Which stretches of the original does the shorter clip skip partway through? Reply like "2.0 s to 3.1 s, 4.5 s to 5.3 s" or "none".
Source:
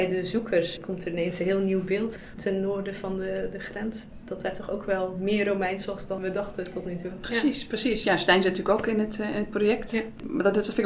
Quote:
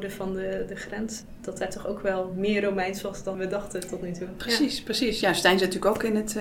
none